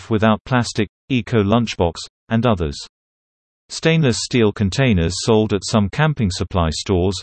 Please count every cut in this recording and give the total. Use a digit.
1